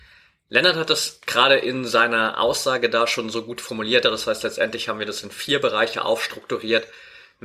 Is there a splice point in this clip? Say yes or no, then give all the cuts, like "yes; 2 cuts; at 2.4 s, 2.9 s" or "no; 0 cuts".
yes; 1 cut; at 4.0 s